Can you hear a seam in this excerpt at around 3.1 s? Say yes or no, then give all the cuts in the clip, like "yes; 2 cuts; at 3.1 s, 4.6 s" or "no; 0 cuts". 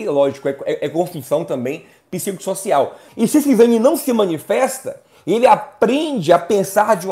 yes; 1 cut; at 3.1 s